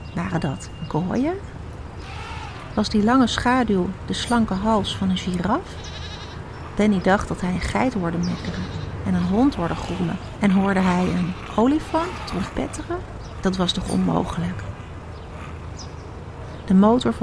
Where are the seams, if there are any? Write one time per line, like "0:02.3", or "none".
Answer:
none